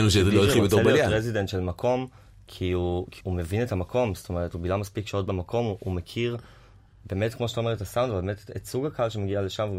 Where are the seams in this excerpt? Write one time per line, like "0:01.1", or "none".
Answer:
0:03.2